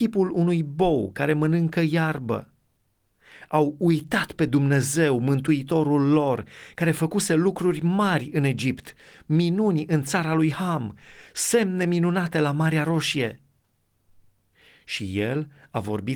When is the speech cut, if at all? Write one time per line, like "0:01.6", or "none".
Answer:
none